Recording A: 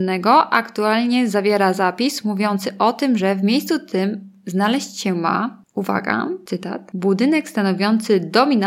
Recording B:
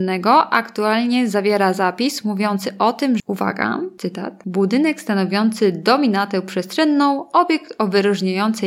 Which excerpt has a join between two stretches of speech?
B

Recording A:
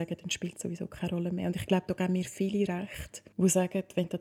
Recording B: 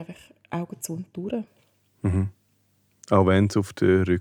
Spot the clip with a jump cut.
A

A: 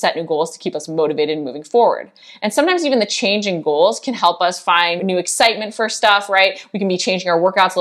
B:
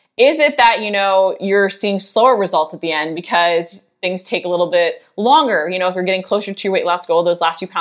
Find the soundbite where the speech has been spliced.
A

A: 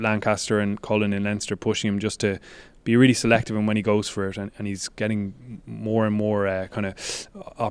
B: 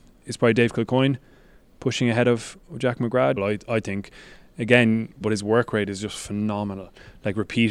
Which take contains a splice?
B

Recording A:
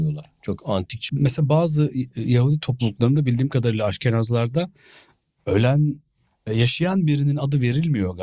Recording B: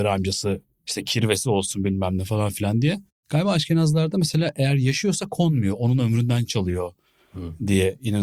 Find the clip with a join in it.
A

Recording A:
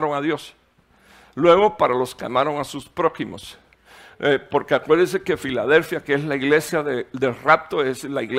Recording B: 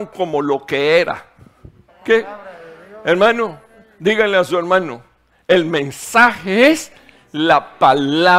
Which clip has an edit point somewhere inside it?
B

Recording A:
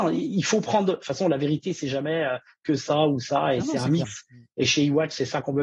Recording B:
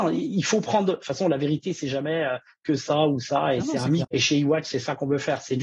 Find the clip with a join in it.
B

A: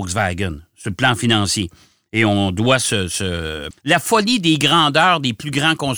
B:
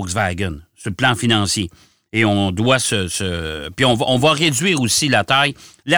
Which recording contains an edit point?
A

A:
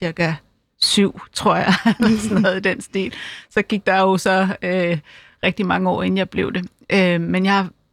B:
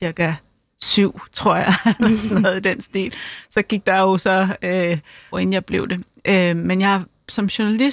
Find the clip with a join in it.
B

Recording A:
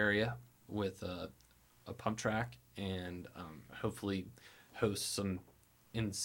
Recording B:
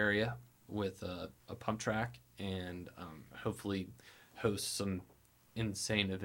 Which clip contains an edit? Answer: B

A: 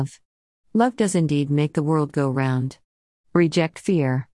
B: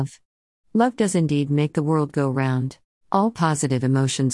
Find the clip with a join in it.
B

